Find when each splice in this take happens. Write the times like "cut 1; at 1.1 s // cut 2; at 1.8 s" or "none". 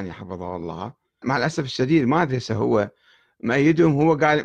cut 1; at 1.2 s

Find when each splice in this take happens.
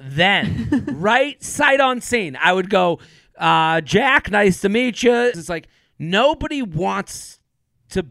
cut 1; at 5.3 s

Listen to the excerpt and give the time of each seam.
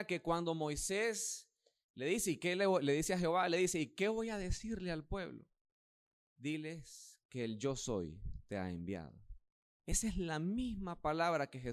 none

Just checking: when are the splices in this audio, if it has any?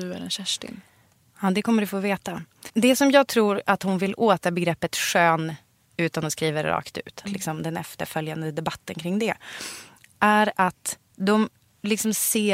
cut 1; at 2.7 s // cut 2; at 7.3 s

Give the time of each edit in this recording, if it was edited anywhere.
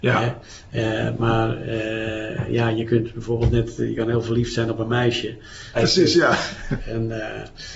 cut 1; at 1.2 s // cut 2; at 5.7 s // cut 3; at 6.8 s

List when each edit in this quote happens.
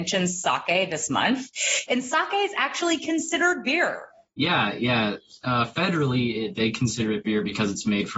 cut 1; at 1.9 s

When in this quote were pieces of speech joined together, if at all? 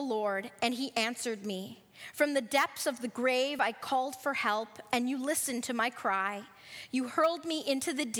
none

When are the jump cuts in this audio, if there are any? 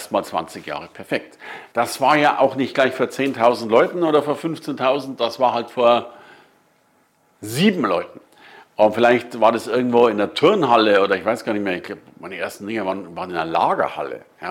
cut 1; at 1.7 s

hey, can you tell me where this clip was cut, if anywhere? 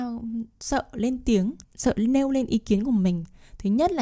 cut 1; at 1.6 s

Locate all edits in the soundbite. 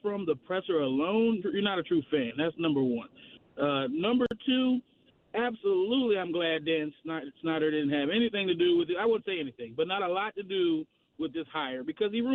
cut 1; at 1.4 s

